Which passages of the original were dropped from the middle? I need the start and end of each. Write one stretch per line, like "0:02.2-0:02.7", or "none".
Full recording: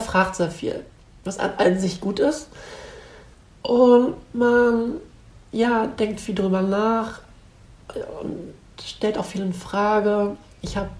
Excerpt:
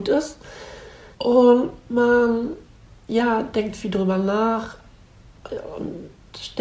0:03.3-0:03.6